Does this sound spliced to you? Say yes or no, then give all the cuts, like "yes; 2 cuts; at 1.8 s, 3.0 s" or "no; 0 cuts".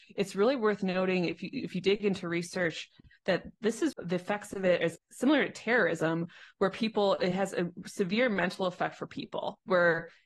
yes; 2 cuts; at 3.9 s, 5.0 s